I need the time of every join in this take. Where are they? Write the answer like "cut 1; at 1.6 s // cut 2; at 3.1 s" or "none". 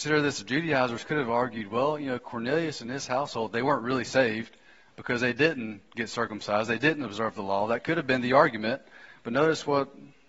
none